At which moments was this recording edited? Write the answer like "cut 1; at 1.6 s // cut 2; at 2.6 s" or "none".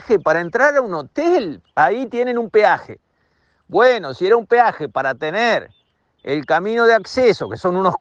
cut 1; at 1.6 s

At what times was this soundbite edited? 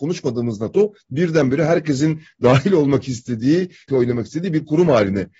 cut 1; at 3.9 s

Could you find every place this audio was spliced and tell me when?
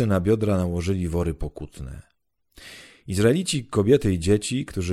none

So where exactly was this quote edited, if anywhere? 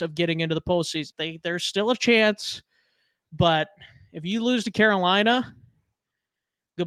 cut 1; at 1.1 s

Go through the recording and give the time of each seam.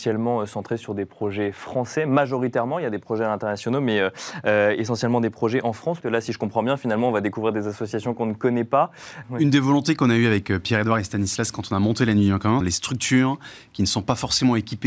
cut 1; at 6.0 s // cut 2; at 9.2 s // cut 3; at 12.6 s

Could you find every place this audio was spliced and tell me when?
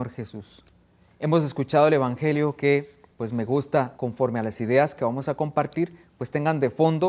cut 1; at 3.9 s

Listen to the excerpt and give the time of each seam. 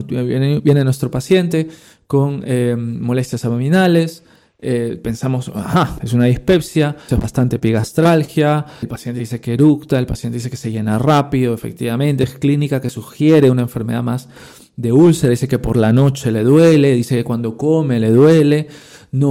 cut 1; at 7.1 s // cut 2; at 8.8 s

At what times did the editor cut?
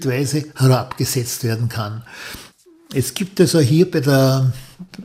none

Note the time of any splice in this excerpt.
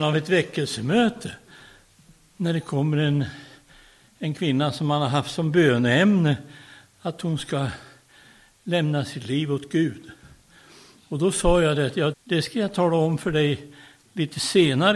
cut 1; at 12.1 s

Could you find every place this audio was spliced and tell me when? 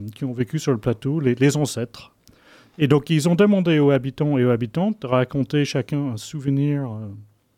none

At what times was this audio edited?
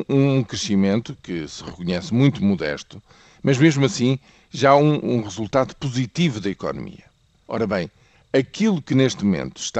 none

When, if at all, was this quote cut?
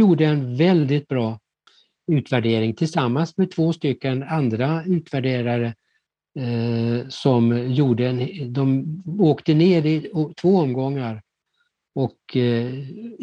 none

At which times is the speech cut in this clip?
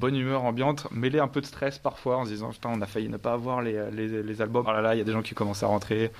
cut 1; at 4.6 s

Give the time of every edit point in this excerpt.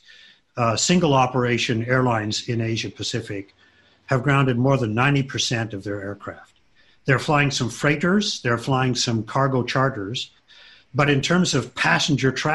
none

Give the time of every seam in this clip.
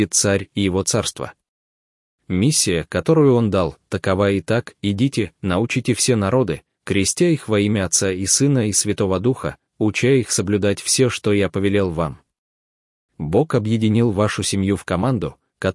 none

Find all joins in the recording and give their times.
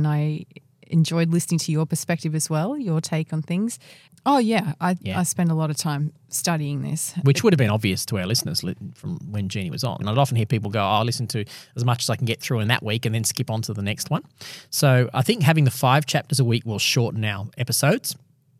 cut 1; at 4.1 s // cut 2; at 10.0 s

